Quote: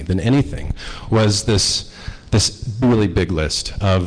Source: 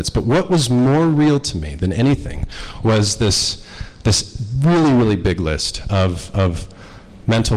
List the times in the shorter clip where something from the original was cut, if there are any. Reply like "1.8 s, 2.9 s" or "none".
2.8 s